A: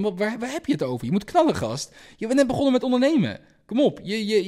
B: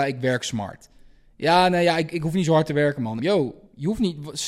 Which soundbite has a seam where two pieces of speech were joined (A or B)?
B